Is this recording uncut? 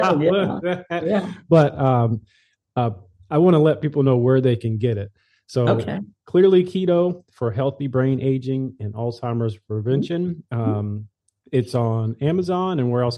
yes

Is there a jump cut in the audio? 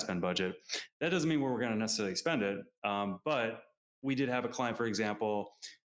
no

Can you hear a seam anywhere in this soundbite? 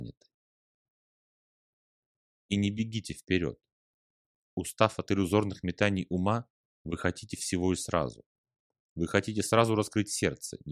no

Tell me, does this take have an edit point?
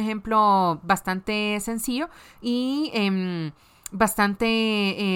no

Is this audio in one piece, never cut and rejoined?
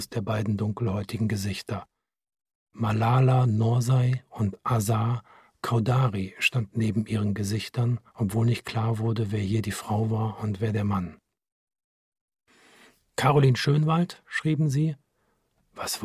yes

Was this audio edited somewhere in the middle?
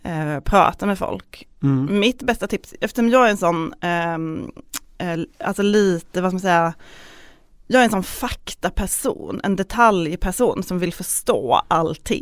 no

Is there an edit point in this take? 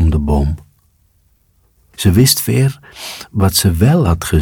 yes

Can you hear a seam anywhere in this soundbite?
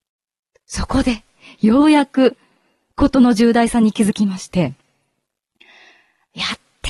no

